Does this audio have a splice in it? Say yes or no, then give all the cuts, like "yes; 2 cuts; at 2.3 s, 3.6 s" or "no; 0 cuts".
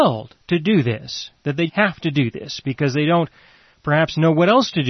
yes; 1 cut; at 1.7 s